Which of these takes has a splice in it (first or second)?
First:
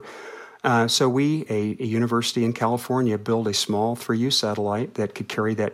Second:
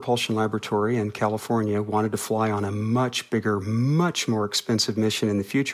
first